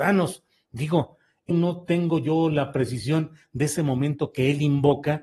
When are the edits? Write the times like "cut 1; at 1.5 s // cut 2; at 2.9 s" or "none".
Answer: cut 1; at 1.5 s